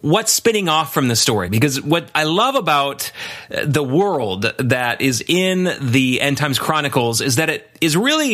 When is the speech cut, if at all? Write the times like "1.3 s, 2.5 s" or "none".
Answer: none